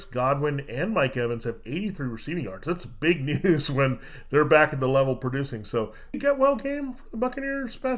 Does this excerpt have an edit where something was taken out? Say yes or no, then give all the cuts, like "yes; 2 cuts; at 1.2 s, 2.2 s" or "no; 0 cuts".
yes; 1 cut; at 6.1 s